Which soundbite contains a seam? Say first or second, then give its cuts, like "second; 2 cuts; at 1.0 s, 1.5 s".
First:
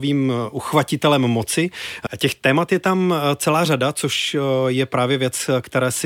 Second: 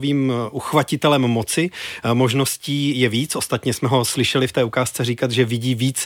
first; 1 cut; at 2.1 s